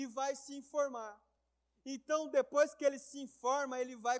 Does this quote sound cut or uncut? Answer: uncut